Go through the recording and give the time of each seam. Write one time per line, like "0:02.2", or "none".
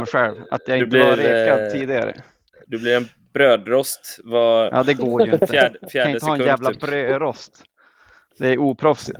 none